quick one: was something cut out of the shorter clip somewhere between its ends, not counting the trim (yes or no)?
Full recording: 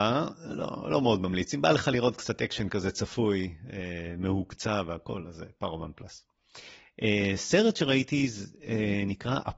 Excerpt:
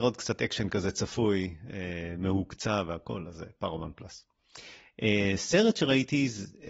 no